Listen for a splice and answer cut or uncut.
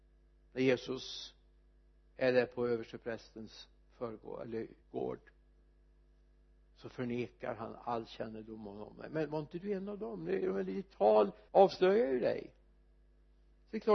cut